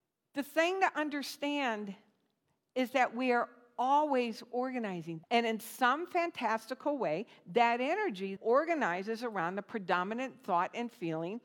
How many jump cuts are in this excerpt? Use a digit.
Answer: 2